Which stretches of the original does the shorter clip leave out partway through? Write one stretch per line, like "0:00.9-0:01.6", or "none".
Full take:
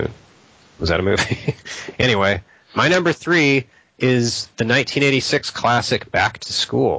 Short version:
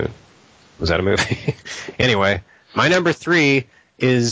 none